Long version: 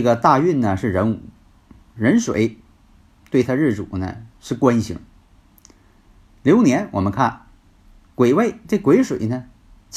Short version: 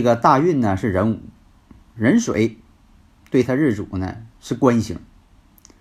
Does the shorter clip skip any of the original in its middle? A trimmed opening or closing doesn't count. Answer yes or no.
no